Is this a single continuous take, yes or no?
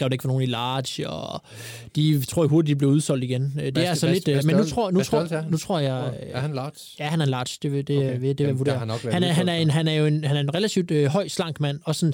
yes